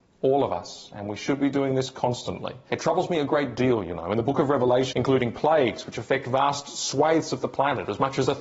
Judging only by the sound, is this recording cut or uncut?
cut